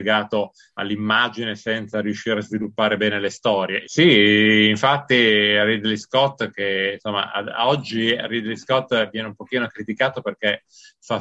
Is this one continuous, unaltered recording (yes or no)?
no